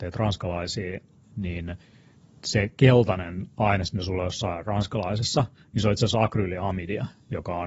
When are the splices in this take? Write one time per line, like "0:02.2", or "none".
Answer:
none